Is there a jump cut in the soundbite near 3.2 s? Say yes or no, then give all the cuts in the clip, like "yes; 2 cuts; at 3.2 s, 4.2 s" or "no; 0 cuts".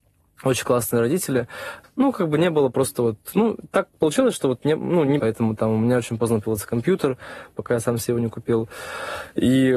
no; 3 cuts; at 1.8 s, 5.2 s, 7.5 s